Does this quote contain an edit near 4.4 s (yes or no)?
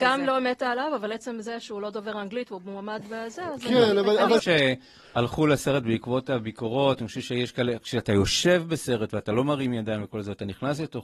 yes